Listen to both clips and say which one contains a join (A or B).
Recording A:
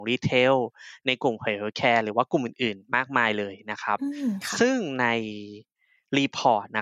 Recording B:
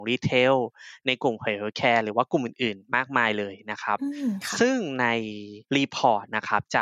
B